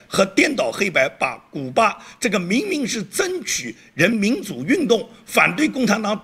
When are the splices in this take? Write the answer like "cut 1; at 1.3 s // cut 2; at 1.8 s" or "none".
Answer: cut 1; at 4.1 s